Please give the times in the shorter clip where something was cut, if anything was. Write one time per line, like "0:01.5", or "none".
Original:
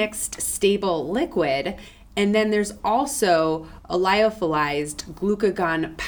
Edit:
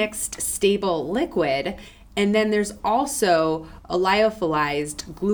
none